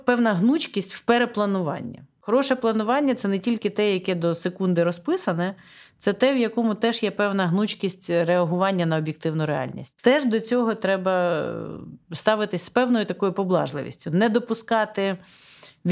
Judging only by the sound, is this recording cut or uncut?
cut